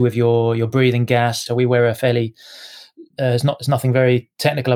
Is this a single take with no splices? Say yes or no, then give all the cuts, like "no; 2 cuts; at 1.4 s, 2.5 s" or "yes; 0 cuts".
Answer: no; 1 cut; at 1.5 s